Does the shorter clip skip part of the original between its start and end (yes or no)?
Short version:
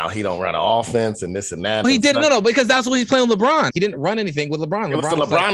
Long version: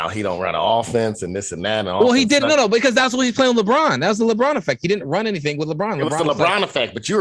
yes